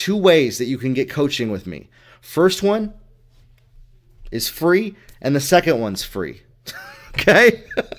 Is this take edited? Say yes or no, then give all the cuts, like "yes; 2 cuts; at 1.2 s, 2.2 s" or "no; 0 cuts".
no; 0 cuts